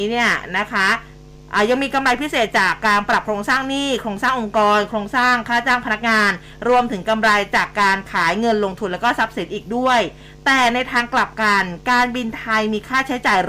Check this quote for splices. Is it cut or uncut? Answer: uncut